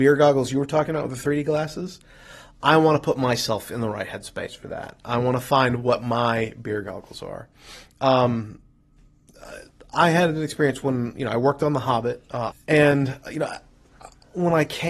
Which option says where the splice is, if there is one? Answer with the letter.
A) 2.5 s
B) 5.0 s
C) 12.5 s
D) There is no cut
C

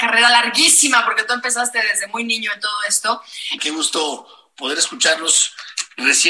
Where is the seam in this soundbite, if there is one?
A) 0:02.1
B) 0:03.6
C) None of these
B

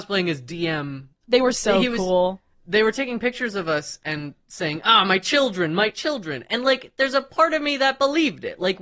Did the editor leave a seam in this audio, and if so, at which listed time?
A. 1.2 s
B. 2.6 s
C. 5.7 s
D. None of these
A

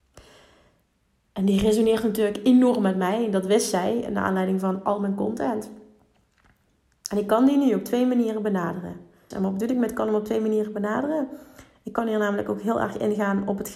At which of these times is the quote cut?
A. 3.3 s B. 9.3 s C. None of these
B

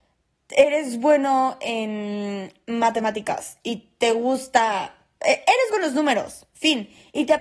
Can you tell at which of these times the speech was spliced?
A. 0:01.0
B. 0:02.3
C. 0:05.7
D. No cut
C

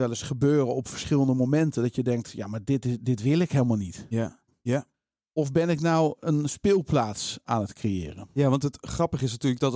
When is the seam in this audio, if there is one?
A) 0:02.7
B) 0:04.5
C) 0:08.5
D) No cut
B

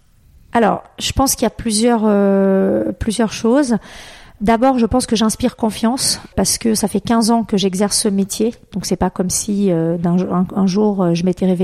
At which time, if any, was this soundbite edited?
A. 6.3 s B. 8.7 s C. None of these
A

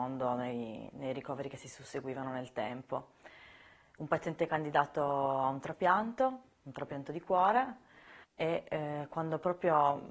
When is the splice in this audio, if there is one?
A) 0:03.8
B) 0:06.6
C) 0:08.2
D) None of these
C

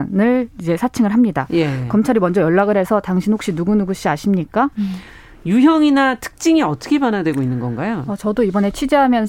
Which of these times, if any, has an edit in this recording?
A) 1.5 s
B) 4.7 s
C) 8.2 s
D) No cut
B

